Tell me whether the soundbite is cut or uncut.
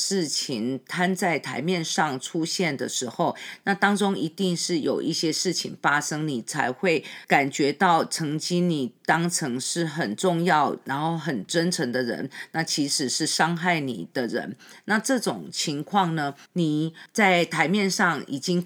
cut